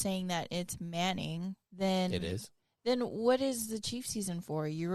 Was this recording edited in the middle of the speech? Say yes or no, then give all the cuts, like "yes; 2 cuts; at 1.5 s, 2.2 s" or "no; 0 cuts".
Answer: yes; 1 cut; at 1.6 s